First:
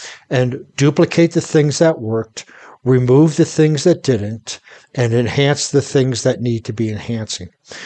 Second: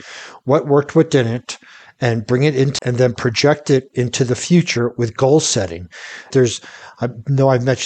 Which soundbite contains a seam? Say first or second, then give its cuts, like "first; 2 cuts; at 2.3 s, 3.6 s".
second; 2 cuts; at 2.8 s, 6.3 s